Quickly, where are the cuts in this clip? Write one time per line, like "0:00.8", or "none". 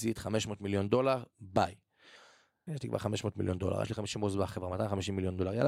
0:02.7
0:03.8